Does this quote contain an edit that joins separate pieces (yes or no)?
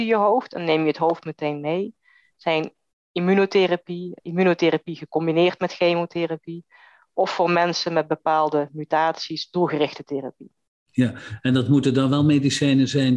yes